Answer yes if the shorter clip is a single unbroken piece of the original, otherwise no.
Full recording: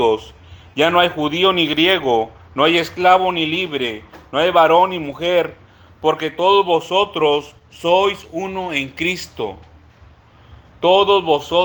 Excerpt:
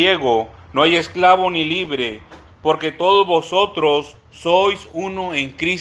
no